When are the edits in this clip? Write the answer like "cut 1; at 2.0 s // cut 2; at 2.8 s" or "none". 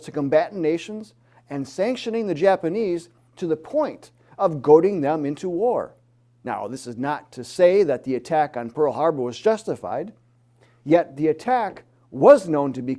none

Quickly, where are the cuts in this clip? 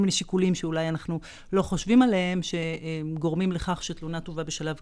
none

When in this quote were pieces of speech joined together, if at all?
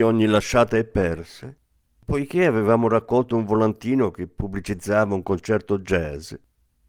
none

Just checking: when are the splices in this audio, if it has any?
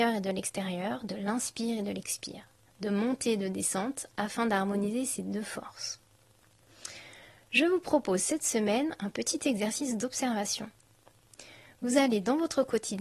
none

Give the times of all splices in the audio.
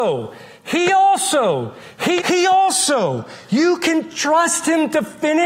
cut 1; at 2.2 s

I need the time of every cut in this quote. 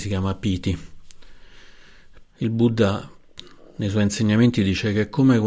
cut 1; at 2.2 s

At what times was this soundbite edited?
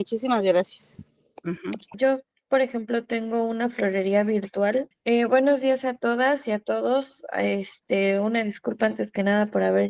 cut 1; at 1.9 s // cut 2; at 4.9 s

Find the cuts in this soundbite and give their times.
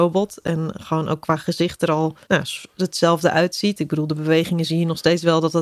cut 1; at 2.2 s

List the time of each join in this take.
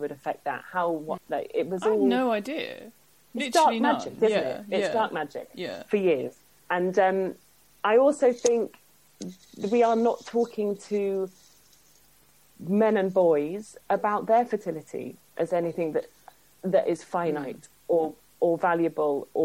cut 1; at 1.2 s

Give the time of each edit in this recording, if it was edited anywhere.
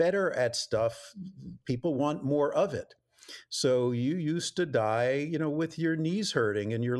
none

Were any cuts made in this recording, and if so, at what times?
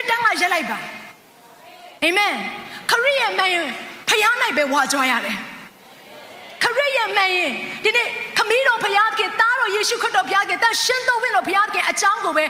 cut 1; at 2.0 s

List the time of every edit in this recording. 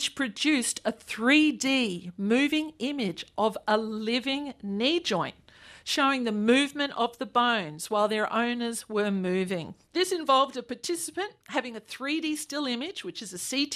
cut 1; at 9.8 s

